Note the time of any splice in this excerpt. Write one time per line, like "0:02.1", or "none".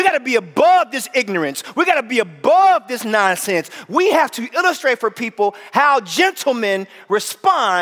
none